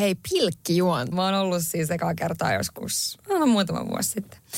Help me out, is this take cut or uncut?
cut